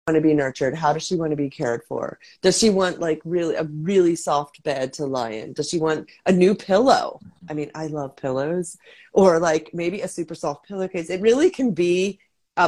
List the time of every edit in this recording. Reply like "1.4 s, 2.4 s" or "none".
none

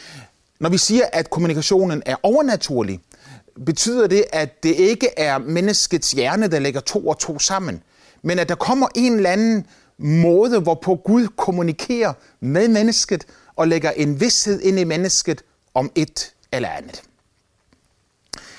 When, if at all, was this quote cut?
none

